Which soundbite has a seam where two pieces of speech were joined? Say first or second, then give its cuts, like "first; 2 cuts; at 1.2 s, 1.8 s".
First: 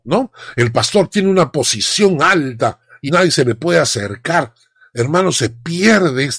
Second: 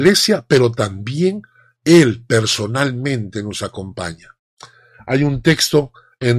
first; 1 cut; at 3.1 s